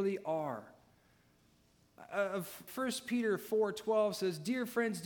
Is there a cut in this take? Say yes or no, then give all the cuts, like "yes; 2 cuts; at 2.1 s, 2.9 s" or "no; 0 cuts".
yes; 1 cut; at 2.7 s